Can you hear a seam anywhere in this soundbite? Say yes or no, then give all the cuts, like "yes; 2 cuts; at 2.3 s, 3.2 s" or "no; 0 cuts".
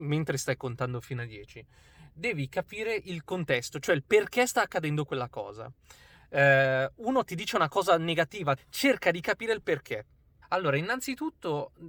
yes; 3 cuts; at 7.3 s, 8.6 s, 10.4 s